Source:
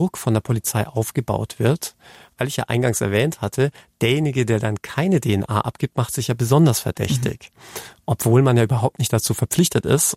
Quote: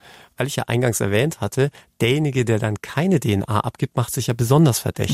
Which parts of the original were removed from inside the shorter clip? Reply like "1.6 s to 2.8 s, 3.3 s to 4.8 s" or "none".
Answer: none